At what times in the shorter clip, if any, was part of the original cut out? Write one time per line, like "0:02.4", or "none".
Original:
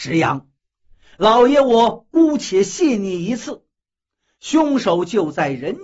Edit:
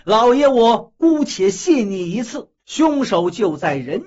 0:02.6

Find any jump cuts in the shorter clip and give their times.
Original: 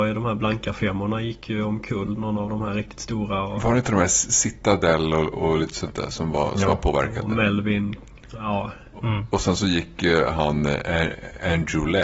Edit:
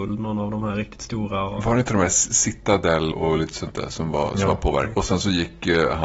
0:03.1
0:04.9

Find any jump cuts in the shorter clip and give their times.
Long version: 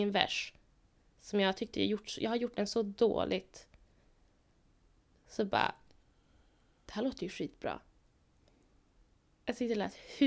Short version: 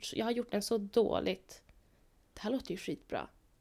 0:02.3

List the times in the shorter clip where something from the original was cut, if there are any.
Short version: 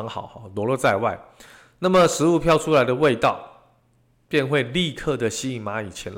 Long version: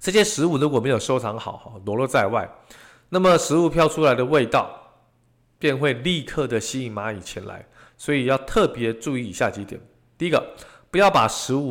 none

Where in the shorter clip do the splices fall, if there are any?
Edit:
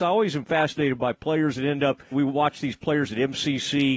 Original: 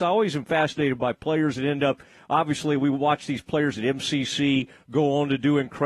0:02.1

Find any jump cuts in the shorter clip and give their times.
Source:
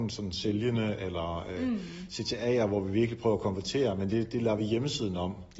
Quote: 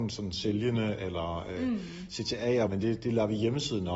0:02.7

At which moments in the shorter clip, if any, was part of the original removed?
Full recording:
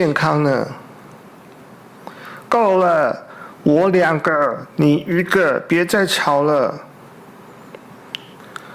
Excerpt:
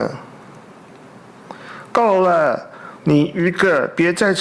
0:03.0

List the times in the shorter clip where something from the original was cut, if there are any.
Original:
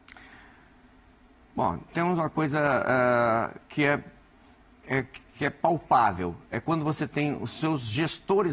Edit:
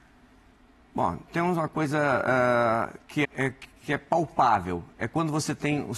0:03.2

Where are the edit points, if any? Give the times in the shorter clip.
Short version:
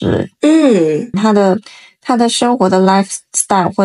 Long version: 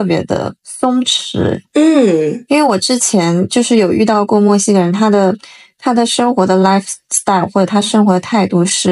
0:01.1

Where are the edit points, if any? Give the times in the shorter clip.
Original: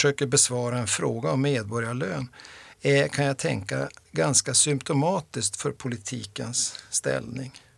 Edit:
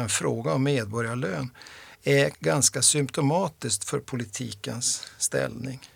0:02.3

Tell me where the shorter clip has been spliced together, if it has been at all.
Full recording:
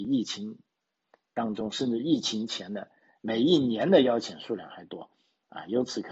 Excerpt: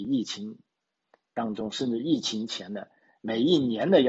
none

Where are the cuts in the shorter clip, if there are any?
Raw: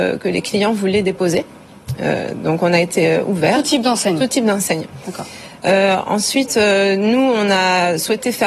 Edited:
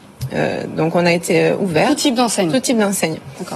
none

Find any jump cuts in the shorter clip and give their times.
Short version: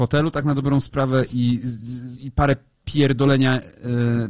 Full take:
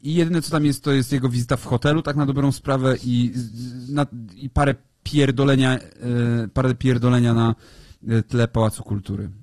0:02.2

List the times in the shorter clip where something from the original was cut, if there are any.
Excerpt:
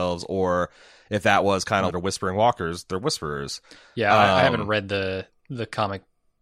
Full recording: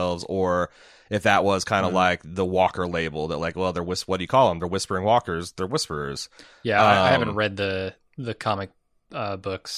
0:01.9

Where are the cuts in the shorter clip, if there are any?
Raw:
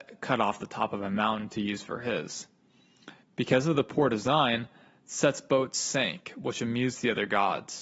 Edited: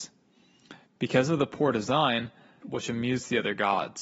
0:02.6

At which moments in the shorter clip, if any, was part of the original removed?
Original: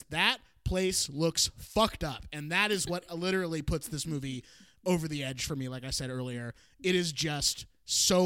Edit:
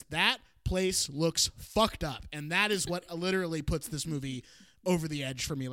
none

